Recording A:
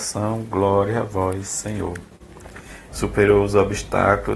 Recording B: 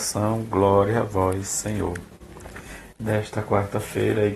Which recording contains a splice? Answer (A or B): A